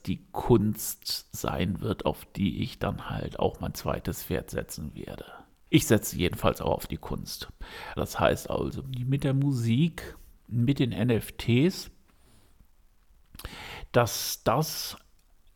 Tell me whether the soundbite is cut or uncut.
cut